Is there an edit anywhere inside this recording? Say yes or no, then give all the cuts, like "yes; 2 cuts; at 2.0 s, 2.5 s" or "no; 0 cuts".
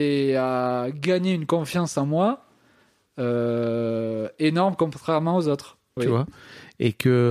yes; 1 cut; at 6.0 s